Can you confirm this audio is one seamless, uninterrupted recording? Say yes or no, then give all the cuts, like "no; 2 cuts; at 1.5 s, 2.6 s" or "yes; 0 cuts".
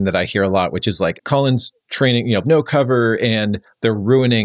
no; 2 cuts; at 1.2 s, 2.4 s